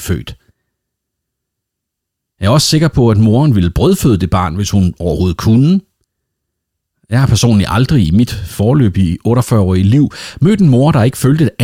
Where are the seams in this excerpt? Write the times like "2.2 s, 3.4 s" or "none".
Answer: none